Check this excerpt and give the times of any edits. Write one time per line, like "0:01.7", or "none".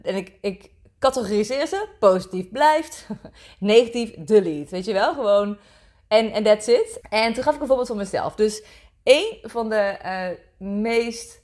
0:07.0